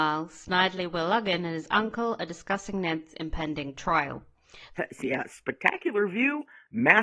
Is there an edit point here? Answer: yes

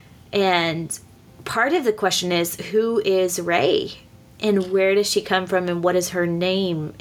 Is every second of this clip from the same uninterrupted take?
yes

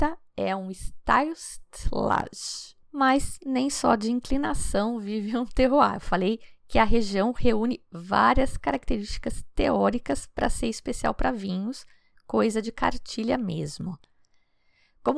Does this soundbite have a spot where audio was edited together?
yes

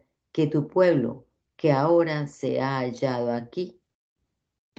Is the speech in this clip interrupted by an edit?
no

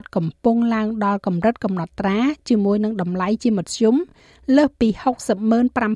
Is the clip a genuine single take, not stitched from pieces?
yes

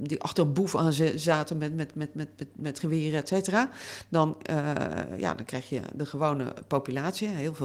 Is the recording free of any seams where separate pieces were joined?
yes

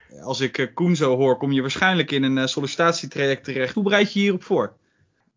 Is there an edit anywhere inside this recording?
yes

